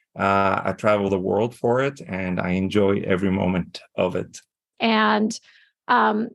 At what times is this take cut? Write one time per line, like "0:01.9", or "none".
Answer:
0:04.7